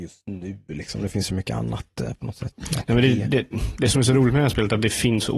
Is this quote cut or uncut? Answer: uncut